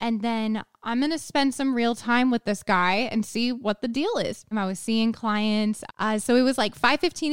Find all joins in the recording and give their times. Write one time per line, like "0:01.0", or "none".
0:04.5
0:05.9